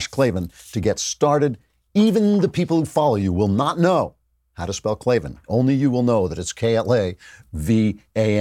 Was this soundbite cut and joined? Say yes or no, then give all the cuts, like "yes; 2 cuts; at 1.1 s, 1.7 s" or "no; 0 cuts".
no; 0 cuts